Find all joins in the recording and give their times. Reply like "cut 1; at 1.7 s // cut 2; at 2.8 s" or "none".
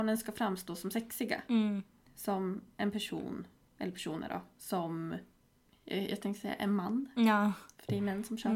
none